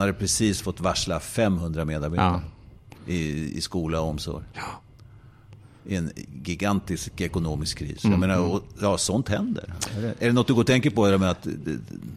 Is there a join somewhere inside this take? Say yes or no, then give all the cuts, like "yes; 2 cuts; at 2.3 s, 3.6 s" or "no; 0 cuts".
yes; 1 cut; at 3.0 s